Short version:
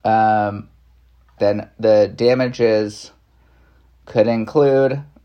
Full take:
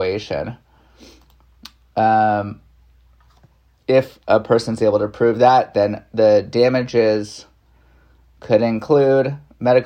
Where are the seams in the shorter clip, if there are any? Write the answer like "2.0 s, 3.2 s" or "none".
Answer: 1.4 s